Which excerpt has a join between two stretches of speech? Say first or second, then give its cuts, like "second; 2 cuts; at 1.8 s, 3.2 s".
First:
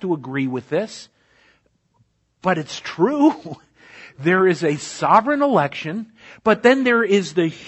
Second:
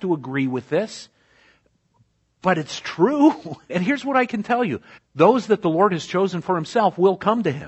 second; 2 cuts; at 3.7 s, 5.0 s